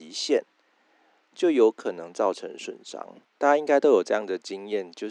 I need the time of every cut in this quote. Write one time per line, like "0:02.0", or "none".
0:03.3